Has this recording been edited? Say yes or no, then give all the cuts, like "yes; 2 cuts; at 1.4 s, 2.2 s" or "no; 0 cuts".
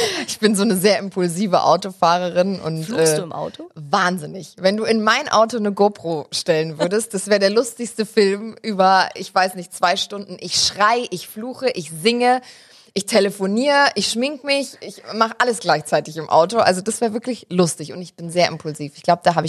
no; 0 cuts